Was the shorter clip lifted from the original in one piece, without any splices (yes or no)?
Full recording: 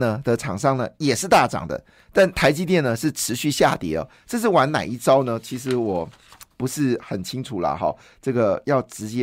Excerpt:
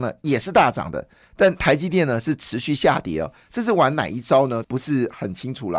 no